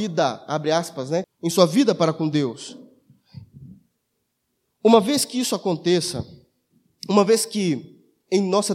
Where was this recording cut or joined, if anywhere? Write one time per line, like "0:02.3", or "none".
0:01.2